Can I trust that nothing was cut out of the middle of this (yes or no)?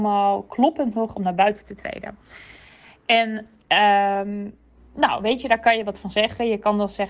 yes